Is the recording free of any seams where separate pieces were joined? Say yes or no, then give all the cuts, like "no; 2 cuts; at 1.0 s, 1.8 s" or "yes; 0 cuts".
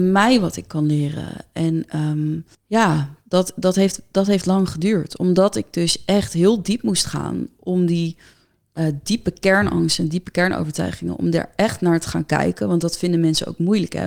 no; 1 cut; at 2.5 s